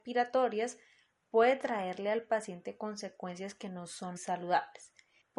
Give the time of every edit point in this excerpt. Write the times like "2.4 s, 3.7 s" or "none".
4.2 s